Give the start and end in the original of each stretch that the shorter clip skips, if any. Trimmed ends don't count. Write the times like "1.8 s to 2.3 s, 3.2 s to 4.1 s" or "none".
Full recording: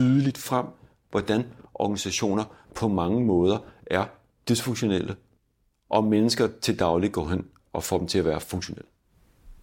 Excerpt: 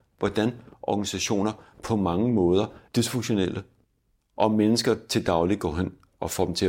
3.8 s to 4.4 s